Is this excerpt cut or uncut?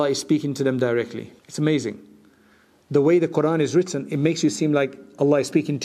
cut